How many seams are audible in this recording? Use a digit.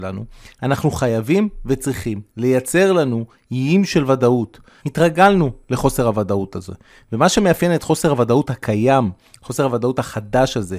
1